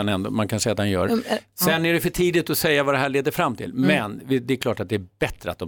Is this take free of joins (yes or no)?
yes